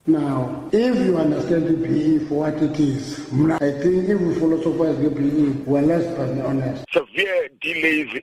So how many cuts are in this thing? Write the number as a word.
one